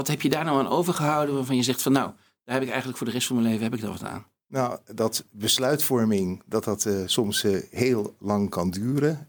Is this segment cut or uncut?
uncut